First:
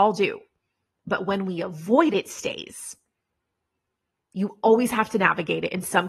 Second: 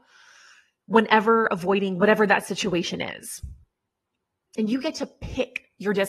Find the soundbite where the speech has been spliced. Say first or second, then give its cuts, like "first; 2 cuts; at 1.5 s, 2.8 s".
first; 1 cut; at 2.1 s